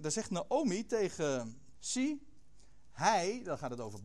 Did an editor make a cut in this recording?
yes; 1 cut; at 1.7 s

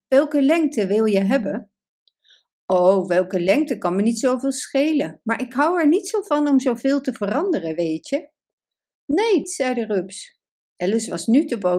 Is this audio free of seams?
no; 1 cut; at 9.4 s

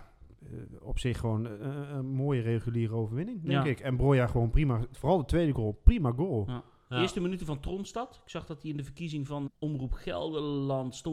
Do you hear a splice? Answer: yes; 1 cut; at 9.5 s

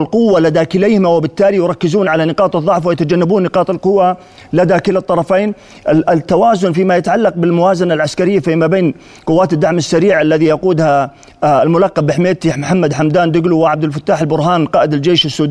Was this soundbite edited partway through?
no; 0 cuts

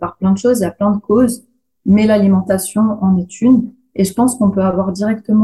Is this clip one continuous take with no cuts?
yes; 0 cuts

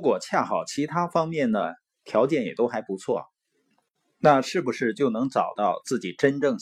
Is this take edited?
no; 0 cuts

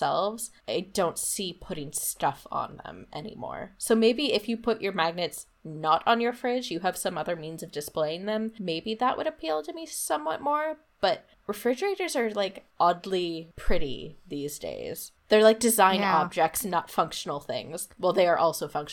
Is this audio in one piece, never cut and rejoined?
yes; 0 cuts

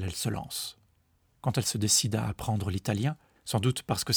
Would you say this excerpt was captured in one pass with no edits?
yes; 0 cuts

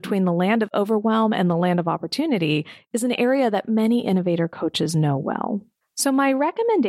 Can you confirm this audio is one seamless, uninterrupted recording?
no; 1 cut; at 5.8 s

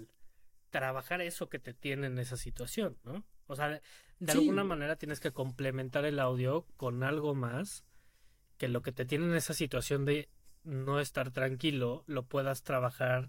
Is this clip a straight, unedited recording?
yes; 0 cuts

